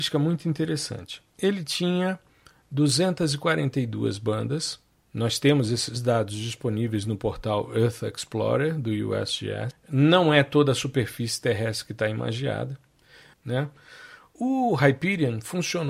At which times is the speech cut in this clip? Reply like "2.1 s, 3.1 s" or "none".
9.7 s, 13.3 s